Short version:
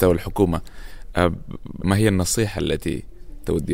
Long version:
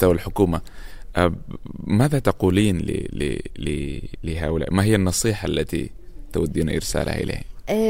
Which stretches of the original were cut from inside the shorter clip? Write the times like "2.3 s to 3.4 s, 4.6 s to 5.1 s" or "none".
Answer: 1.8 s to 4.7 s